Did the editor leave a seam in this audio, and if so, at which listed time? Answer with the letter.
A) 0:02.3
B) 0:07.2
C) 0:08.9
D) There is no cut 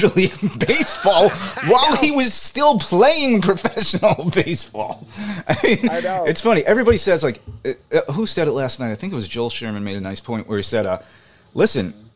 D